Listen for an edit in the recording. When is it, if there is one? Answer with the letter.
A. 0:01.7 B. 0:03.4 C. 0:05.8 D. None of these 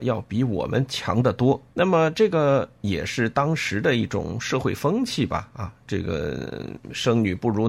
A